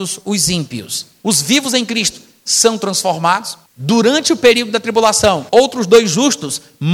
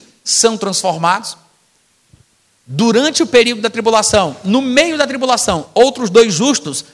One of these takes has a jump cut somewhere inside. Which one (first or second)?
first